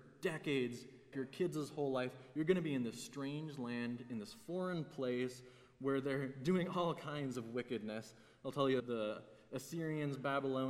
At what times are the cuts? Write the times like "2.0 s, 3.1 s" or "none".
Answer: 1.1 s, 8.8 s